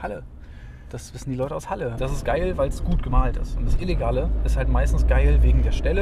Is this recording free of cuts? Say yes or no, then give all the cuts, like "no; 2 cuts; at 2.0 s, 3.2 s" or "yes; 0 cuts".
no; 1 cut; at 2.0 s